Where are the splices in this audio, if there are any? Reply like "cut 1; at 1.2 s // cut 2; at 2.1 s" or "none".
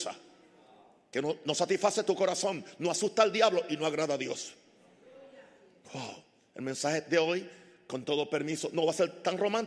none